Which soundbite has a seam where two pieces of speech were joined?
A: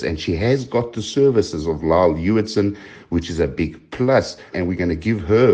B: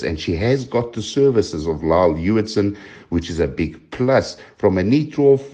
A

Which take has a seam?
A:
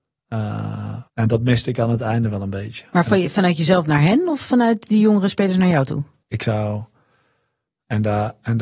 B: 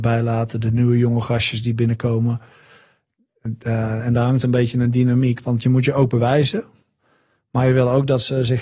A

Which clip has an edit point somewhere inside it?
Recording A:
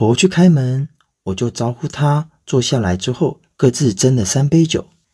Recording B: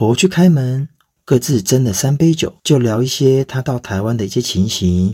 B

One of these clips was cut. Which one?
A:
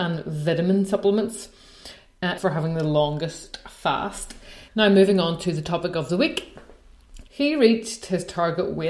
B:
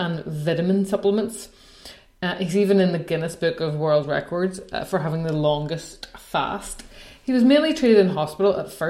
A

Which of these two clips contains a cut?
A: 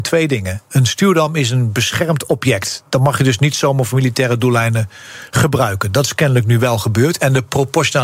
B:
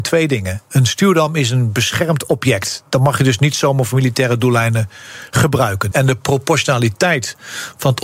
B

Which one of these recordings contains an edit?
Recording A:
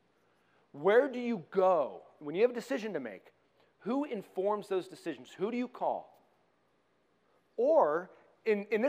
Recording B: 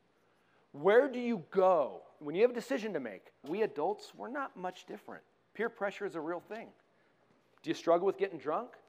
B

